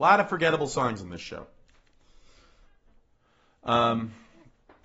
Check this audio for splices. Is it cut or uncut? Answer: uncut